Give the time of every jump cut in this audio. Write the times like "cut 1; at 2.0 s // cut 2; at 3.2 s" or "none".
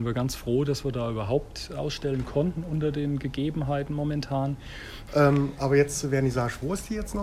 cut 1; at 5.1 s